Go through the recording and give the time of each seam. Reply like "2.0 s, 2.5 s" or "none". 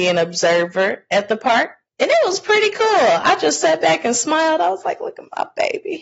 1.8 s